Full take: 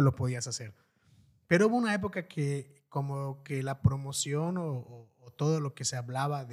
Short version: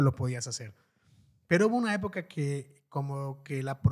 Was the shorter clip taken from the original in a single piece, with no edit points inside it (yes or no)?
yes